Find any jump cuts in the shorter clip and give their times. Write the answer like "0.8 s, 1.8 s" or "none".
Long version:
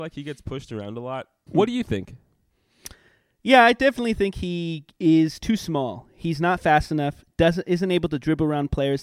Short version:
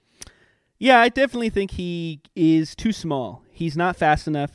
none